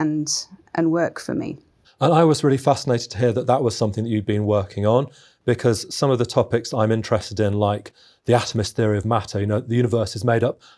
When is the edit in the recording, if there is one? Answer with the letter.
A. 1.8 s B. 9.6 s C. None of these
A